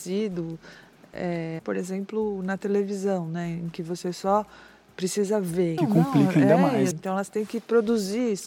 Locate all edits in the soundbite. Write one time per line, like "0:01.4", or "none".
0:01.6
0:05.8
0:06.9